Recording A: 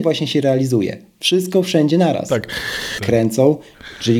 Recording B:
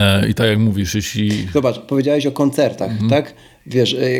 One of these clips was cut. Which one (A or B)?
A